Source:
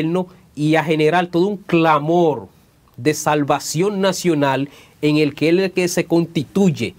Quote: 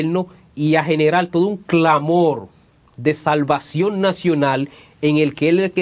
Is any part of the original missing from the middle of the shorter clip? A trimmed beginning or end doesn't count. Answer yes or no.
no